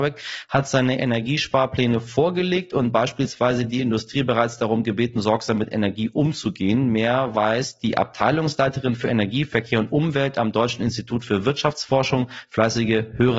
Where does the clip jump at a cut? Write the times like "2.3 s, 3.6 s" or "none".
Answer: none